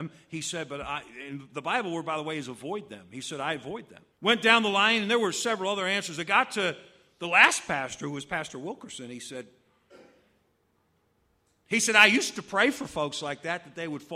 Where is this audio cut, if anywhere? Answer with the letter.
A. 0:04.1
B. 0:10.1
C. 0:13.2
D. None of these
A